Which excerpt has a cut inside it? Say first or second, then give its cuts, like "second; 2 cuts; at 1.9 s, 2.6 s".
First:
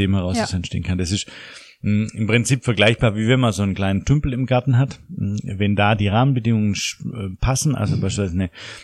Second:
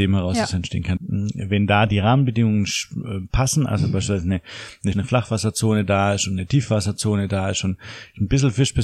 second; 2 cuts; at 1.0 s, 4.9 s